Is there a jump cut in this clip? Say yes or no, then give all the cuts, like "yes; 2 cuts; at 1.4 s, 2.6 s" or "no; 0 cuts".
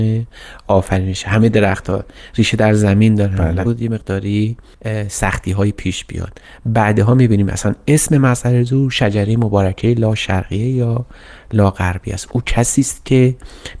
yes; 1 cut; at 3.6 s